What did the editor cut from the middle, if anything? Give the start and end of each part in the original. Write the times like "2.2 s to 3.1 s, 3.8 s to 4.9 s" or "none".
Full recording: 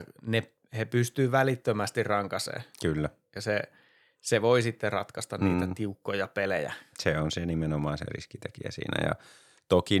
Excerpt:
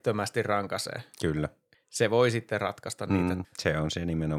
3.4 s to 4.1 s, 5.8 s to 6.9 s